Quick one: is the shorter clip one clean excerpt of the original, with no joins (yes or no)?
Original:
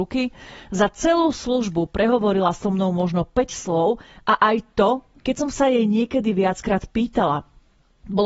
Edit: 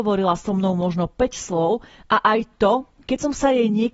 yes